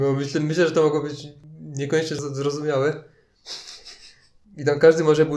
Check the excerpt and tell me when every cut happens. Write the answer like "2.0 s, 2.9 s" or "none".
4.4 s